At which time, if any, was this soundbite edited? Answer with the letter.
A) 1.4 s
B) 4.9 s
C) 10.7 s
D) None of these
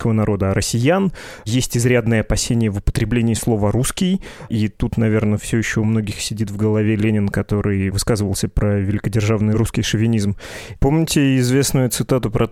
C